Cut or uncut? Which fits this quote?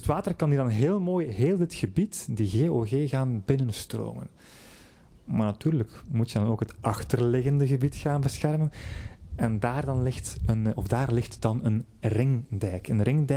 uncut